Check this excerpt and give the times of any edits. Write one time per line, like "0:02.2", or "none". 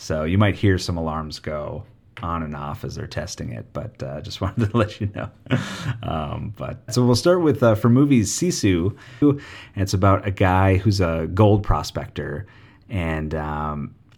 0:06.9
0:09.2